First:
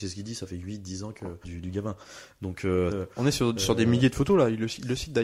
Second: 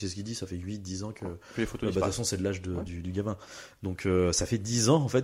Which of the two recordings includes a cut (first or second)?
first